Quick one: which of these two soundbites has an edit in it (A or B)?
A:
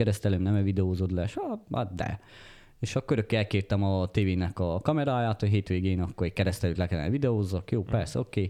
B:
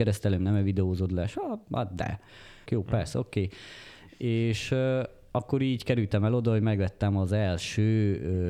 B